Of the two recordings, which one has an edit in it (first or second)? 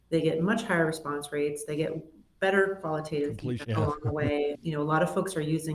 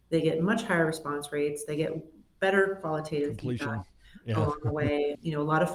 first